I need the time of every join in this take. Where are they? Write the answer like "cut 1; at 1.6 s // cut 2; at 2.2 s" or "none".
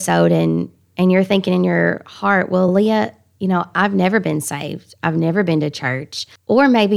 none